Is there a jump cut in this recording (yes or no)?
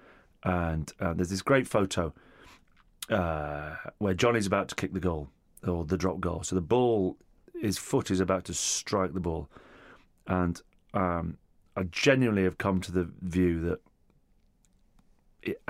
no